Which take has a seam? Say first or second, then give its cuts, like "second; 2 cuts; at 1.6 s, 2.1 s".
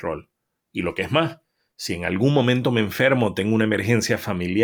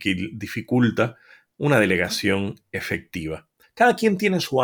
second; 1 cut; at 3.6 s